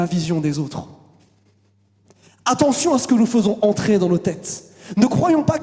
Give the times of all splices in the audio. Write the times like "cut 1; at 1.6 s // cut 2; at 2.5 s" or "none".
none

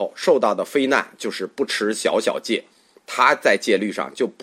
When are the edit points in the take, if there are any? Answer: none

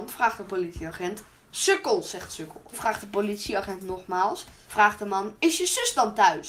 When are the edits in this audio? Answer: cut 1; at 2.7 s // cut 2; at 4.6 s

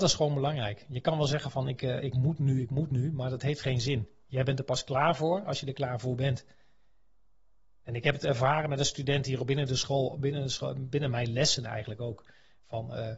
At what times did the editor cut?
none

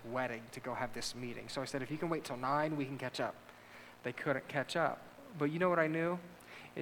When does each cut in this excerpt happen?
none

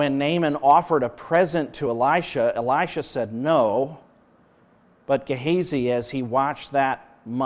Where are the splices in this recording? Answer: none

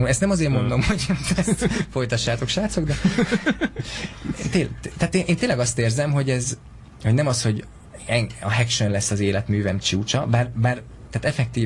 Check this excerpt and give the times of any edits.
none

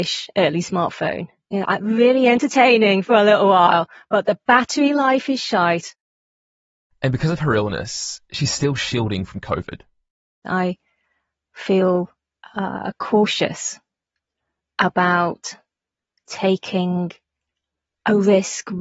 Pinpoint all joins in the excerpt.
cut 1; at 6.9 s

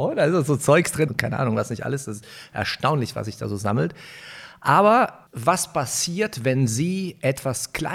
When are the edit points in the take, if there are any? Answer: cut 1; at 1.1 s // cut 2; at 5.3 s

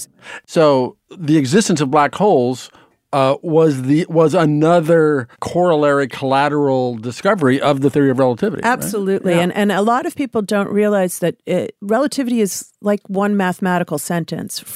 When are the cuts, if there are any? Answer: cut 1; at 5.3 s

